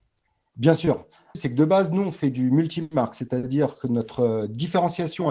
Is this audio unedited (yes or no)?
no